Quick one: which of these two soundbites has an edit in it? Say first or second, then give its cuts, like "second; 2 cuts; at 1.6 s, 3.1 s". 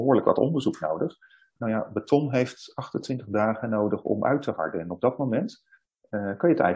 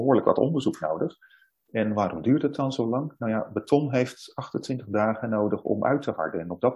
first; 1 cut; at 1.6 s